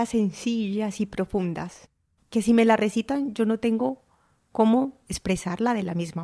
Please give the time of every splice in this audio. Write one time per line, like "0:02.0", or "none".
0:02.2